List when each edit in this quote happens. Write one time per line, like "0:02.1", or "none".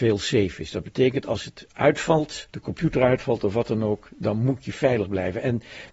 0:02.5